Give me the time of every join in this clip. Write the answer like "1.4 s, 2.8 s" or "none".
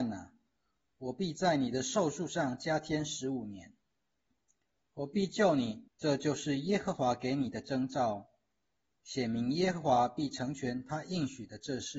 5.9 s